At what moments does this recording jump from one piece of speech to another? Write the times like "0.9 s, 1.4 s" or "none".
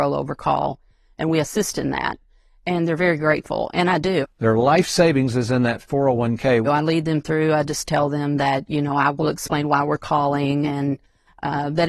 4.2 s, 6.6 s